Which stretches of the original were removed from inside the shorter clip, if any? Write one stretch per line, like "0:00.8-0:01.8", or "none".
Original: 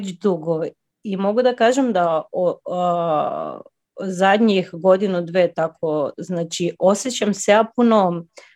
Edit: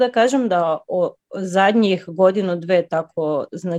0:02.6-0:03.8